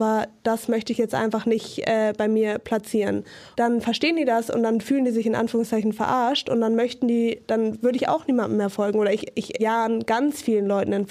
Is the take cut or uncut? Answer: cut